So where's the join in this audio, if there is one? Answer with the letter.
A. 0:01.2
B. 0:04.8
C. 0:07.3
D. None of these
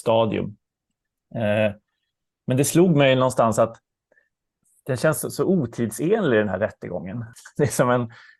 C